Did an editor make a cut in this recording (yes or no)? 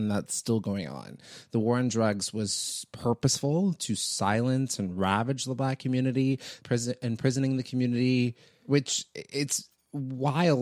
yes